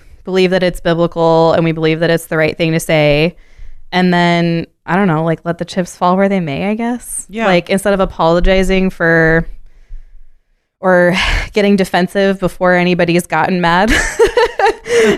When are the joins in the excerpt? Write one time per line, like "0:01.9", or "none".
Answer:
none